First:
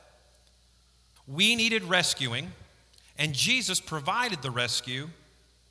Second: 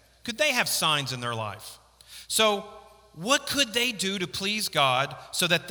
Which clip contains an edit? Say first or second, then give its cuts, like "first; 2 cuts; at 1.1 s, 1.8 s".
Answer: first; 1 cut; at 1.2 s